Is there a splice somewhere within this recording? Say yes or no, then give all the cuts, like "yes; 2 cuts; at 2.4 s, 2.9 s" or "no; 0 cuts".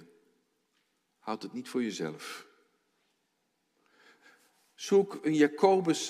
no; 0 cuts